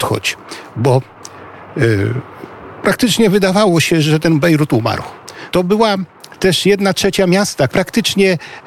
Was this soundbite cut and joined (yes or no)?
yes